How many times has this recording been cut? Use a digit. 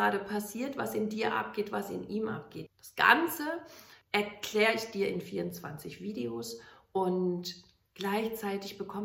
2